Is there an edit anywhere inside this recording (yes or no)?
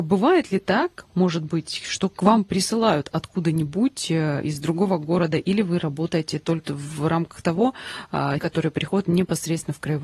yes